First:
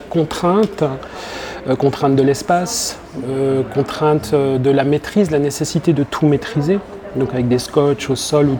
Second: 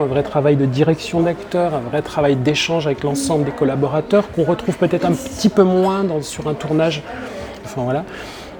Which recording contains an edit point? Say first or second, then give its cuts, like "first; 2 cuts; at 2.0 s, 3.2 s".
second; 1 cut; at 7.6 s